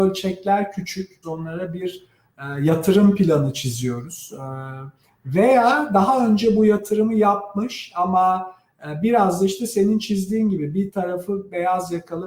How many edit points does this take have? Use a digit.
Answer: 1